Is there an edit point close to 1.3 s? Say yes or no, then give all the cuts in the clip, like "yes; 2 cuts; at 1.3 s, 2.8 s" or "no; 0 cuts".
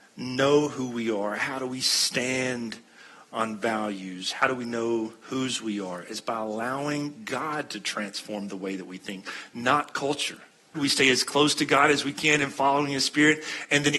no; 2 cuts; at 5.2 s, 10.7 s